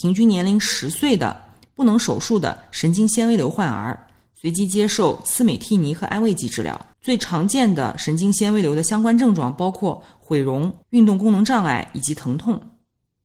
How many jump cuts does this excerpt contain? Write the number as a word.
two